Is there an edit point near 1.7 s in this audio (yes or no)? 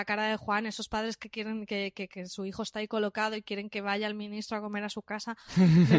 no